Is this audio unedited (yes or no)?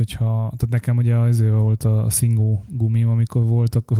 yes